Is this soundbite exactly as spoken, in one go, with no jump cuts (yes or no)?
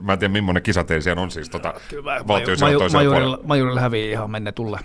yes